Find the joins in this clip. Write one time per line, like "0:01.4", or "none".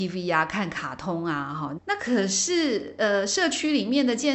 0:01.8

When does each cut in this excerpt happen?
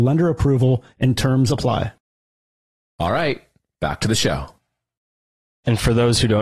none

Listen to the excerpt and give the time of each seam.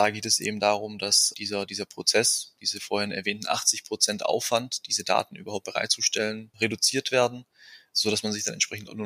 none

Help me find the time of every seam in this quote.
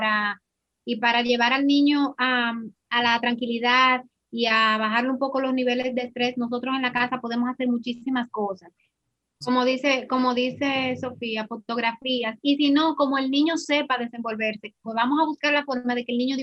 0:02.8
0:09.4
0:14.8

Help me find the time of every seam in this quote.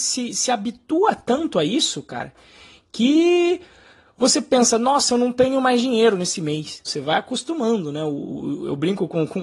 0:06.9

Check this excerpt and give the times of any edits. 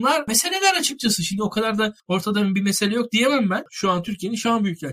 0:03.7

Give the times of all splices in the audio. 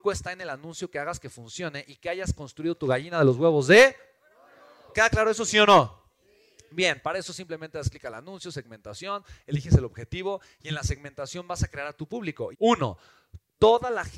0:04.9
0:12.5

